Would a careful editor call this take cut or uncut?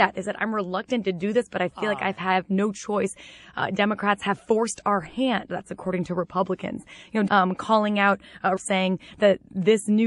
cut